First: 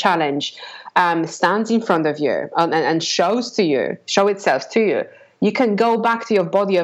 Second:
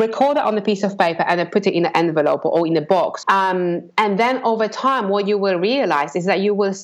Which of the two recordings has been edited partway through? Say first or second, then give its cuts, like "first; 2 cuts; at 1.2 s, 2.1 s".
second; 1 cut; at 3.2 s